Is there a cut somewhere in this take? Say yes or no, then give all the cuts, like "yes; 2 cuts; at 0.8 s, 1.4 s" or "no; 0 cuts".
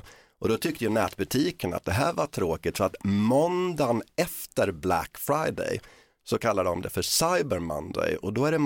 no; 0 cuts